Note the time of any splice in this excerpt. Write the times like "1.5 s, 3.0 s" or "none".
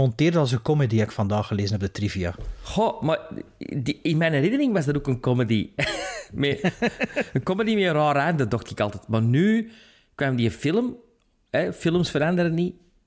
none